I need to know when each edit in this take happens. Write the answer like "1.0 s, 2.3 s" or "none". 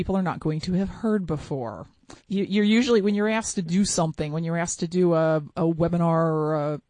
2.2 s